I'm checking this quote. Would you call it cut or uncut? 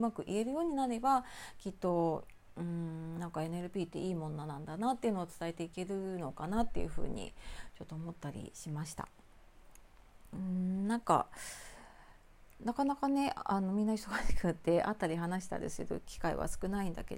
uncut